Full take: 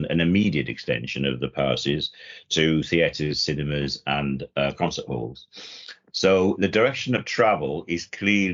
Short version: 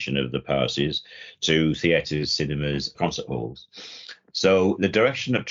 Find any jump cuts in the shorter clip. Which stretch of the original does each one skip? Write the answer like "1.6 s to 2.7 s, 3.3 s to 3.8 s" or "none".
4.0 s to 4.7 s